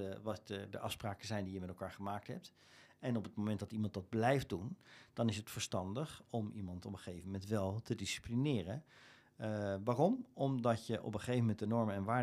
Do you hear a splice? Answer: no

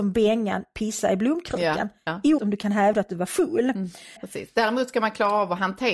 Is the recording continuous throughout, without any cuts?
no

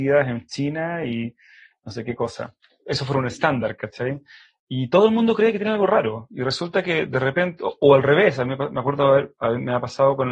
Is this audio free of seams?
yes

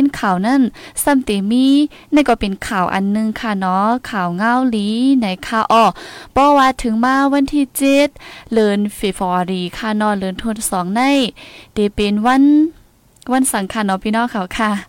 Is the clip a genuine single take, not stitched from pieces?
yes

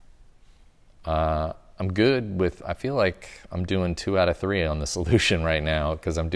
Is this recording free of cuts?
no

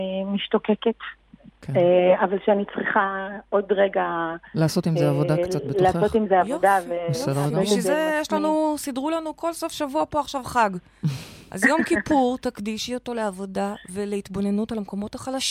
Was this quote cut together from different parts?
no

